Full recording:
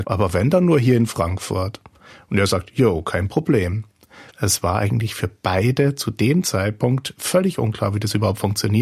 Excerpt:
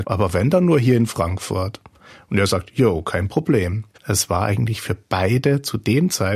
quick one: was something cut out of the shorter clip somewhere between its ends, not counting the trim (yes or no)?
yes